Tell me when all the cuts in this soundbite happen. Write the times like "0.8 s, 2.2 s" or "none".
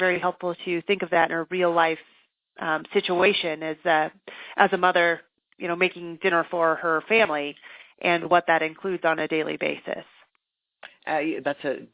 none